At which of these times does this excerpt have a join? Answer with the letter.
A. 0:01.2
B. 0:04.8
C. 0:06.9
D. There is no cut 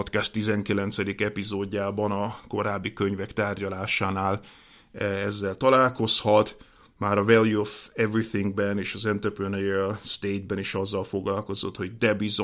D